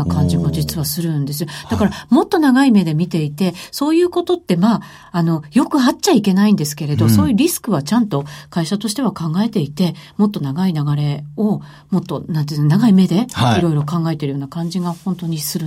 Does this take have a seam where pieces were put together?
no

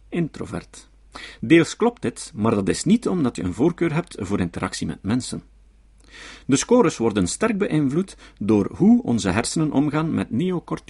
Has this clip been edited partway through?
no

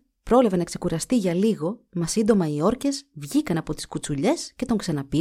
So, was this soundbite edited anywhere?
no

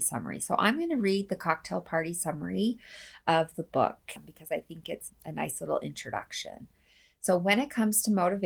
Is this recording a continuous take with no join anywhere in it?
yes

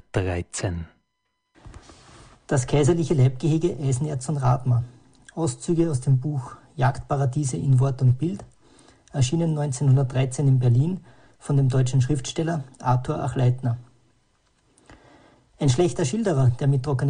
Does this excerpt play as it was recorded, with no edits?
yes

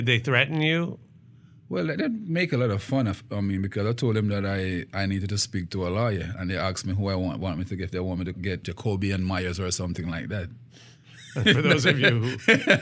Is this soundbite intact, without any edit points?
yes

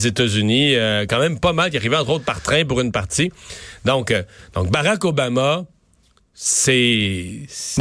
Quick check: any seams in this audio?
no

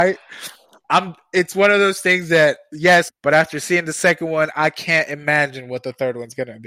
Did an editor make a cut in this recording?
yes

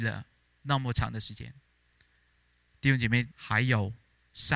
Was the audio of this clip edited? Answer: yes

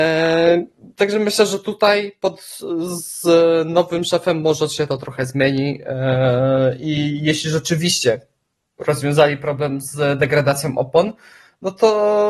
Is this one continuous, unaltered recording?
yes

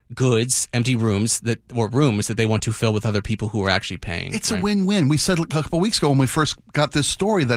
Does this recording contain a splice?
no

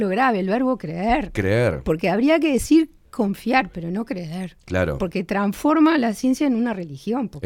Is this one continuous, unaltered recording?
yes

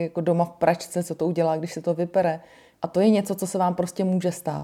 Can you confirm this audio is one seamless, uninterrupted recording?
no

